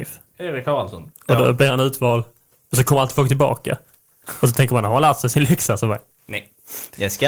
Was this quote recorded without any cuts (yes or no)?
no